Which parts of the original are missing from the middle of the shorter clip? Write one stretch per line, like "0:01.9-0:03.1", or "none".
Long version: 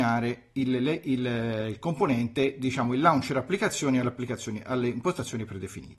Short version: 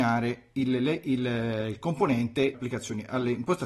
0:02.5-0:04.1